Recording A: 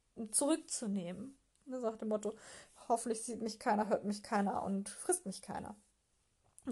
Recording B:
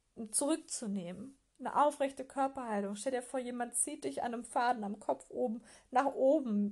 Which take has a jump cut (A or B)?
A